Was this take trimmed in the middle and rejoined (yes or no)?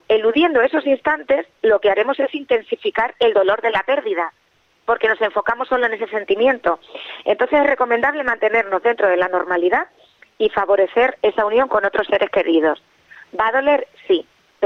no